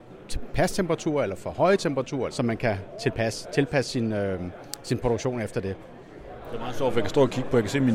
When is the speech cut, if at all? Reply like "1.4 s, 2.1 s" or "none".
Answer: 2.3 s